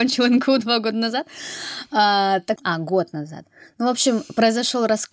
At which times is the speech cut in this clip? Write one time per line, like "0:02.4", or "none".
0:02.6